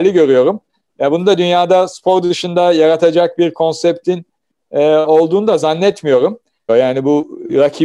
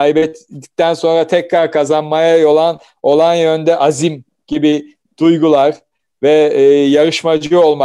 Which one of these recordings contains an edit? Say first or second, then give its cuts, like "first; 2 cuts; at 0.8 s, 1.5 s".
first; 1 cut; at 6.7 s